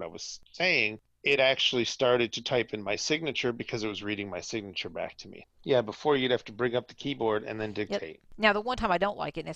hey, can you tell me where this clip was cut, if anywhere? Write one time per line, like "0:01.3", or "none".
0:05.4
0:08.2